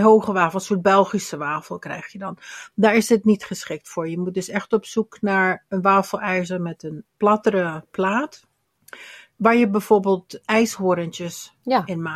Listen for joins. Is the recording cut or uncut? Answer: uncut